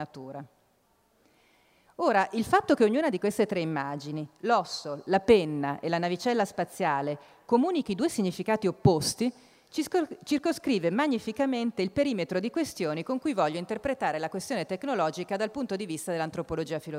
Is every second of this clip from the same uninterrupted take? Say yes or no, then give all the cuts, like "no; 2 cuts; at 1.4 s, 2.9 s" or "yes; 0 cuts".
yes; 0 cuts